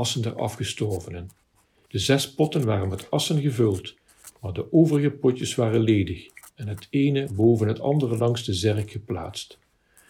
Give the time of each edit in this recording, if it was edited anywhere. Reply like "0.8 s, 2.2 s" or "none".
1.9 s

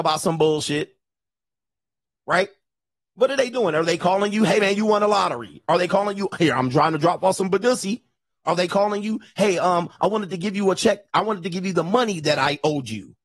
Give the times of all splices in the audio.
none

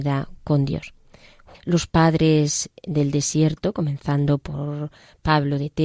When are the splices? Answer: 1.5 s

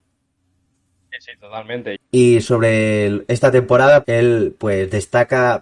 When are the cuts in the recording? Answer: 2.0 s, 4.0 s

